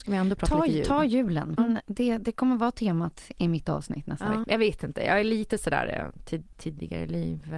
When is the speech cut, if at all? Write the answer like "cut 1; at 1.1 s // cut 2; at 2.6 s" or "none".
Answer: cut 1; at 1.6 s // cut 2; at 4.4 s